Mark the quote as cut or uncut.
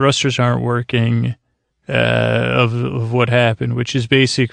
cut